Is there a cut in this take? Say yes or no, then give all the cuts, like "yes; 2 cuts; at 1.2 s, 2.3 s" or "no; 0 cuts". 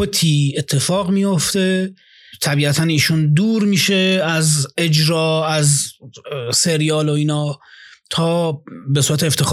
no; 0 cuts